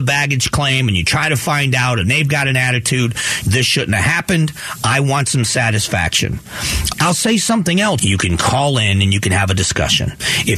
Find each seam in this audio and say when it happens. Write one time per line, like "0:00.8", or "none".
0:03.4
0:06.9
0:08.0